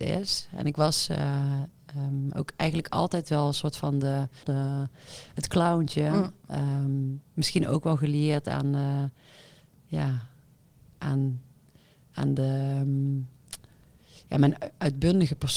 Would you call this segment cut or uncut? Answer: cut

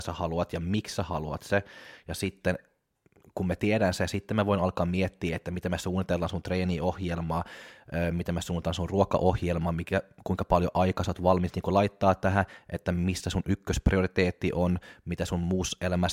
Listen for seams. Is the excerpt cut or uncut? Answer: uncut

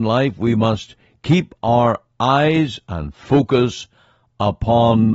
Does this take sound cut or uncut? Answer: uncut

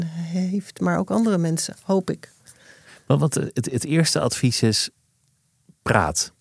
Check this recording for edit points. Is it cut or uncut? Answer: uncut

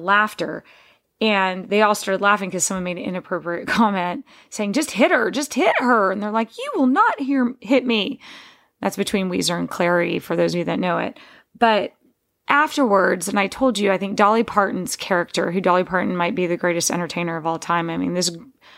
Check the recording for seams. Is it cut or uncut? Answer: uncut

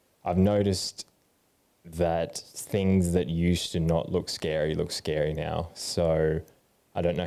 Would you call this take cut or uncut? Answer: uncut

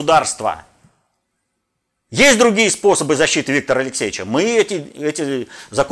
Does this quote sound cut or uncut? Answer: uncut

